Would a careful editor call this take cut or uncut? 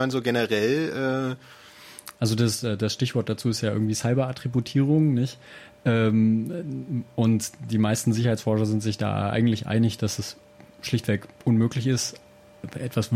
uncut